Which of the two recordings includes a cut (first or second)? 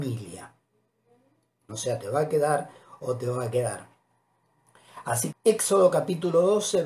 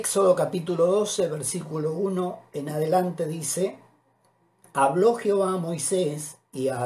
first